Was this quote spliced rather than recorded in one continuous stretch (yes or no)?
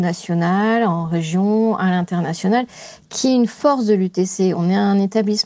no